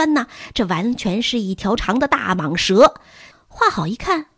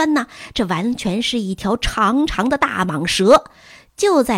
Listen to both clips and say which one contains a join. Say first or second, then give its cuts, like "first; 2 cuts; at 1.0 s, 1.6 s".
first; 2 cuts; at 1.8 s, 3.3 s